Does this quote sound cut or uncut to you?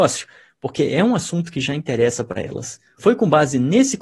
cut